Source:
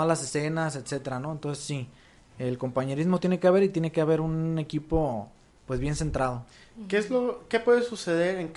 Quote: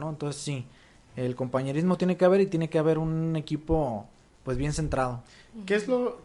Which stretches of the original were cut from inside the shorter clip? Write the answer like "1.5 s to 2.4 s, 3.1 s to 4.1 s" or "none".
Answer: none